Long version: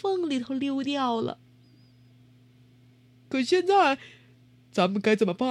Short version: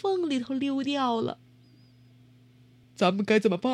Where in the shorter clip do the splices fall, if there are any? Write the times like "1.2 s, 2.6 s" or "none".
2.8 s